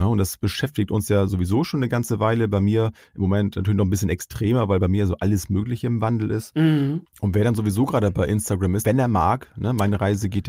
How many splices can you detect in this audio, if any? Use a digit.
2